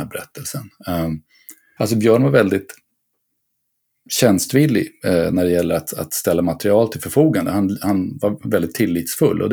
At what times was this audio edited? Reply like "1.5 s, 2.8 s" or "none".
1.8 s